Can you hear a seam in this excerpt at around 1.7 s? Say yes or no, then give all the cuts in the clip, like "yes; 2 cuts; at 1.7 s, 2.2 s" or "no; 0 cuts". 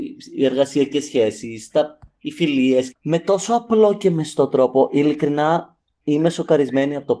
no; 1 cut; at 2.9 s